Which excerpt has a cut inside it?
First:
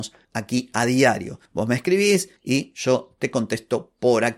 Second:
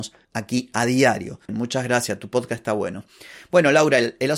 second; 1 cut; at 1.5 s

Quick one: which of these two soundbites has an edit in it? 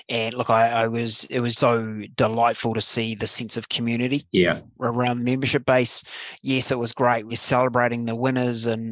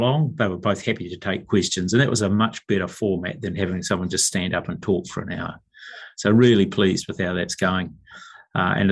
first; 1 cut; at 1.6 s

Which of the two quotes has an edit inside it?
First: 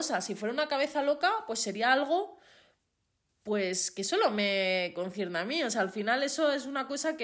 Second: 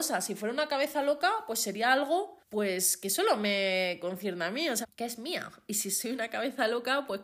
second; 2 cuts; at 2.4 s, 4.8 s

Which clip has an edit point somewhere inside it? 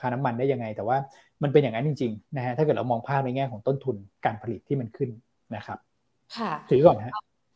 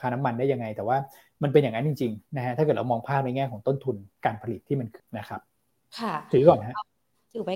second; 1 cut; at 5.0 s

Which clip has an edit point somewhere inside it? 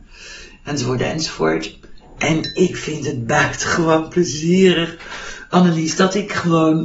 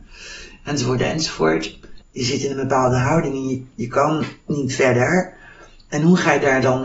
second; 1 cut; at 2.0 s

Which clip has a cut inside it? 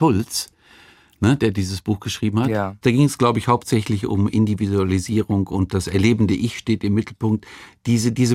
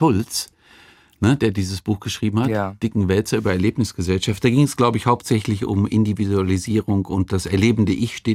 first; 1 cut; at 2.8 s

